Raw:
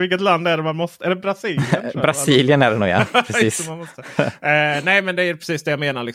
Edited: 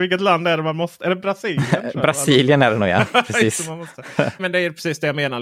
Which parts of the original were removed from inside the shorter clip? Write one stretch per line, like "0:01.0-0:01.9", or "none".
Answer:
0:04.4-0:05.0